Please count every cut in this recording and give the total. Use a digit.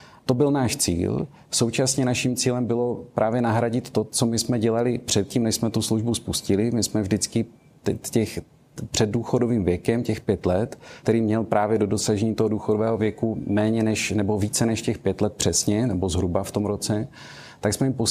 1